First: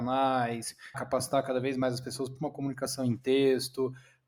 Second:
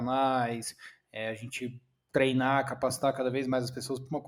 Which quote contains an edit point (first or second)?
first